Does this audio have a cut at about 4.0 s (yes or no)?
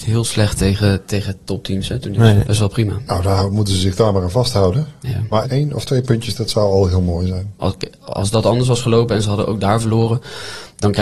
no